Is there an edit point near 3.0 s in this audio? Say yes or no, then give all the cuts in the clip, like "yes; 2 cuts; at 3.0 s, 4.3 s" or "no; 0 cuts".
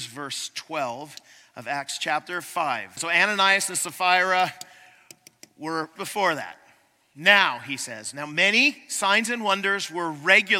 yes; 2 cuts; at 3.0 s, 6.0 s